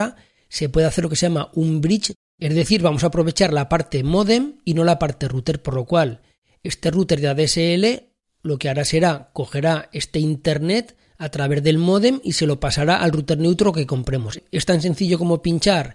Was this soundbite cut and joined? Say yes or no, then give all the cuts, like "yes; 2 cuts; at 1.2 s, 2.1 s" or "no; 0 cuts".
no; 0 cuts